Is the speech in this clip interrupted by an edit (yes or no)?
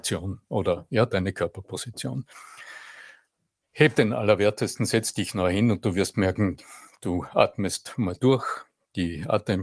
no